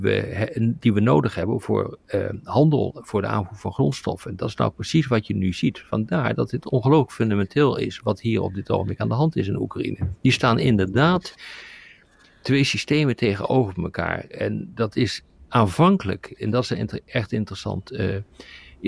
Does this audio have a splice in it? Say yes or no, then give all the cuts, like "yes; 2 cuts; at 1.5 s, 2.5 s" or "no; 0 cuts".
no; 0 cuts